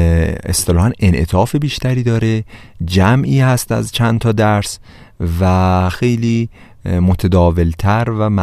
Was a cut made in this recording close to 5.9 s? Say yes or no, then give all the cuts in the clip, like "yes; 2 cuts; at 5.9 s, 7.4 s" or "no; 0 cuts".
yes; 1 cut; at 5.9 s